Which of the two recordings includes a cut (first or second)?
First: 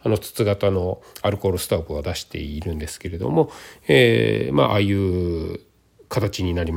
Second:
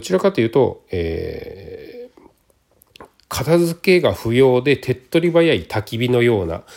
first